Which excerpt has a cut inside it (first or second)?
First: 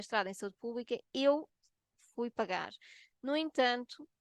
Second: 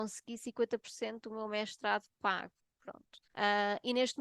second